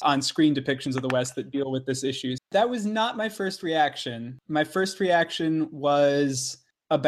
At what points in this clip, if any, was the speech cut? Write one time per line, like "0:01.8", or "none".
0:02.4